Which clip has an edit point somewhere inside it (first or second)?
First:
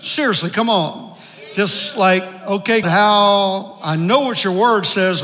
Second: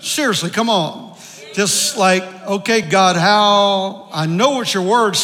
first